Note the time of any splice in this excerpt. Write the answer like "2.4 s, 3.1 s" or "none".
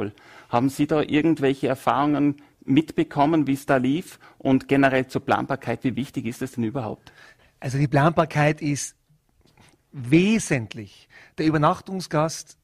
none